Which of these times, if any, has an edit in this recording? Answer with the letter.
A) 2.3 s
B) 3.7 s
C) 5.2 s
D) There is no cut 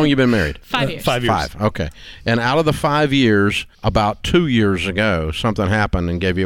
B